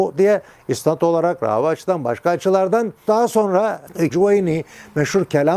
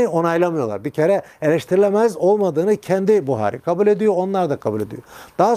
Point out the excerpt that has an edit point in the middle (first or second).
first